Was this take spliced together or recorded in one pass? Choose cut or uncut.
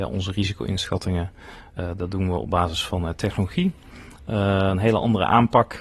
uncut